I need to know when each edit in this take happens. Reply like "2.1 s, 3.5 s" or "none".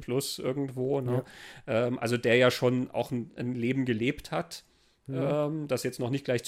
none

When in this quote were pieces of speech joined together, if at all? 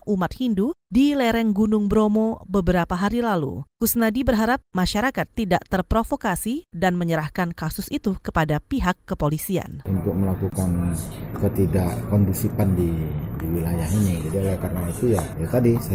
none

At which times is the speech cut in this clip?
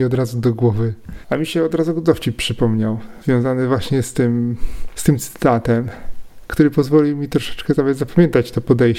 1.2 s

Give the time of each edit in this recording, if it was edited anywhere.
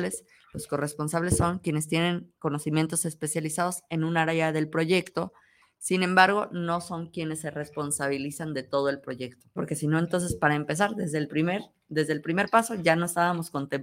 9.6 s

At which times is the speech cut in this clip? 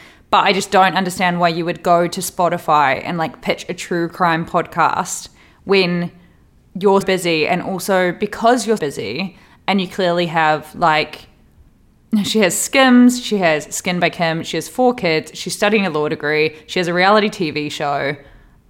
7.0 s, 8.8 s

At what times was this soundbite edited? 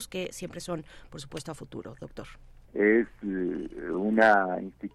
2.7 s

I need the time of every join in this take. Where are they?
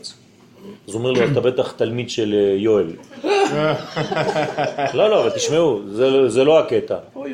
none

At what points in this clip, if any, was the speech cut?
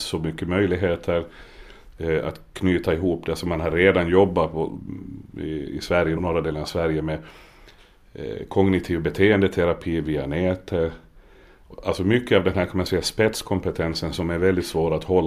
6.2 s

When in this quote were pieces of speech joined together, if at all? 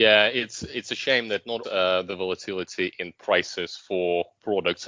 1.6 s

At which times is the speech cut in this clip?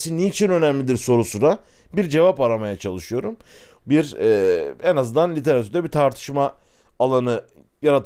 3.8 s

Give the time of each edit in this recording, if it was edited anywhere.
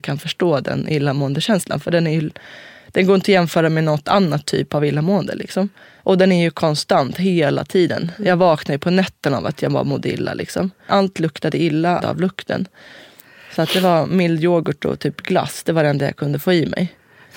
10.9 s, 12.0 s

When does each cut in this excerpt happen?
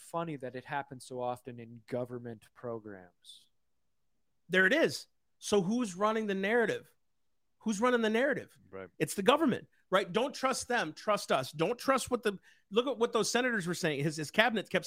none

